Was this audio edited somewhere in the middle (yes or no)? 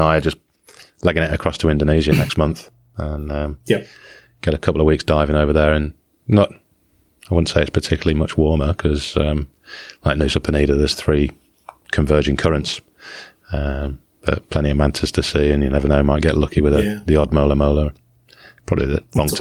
no